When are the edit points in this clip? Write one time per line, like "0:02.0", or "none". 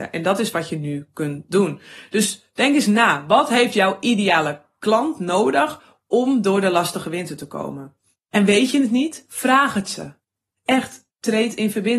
none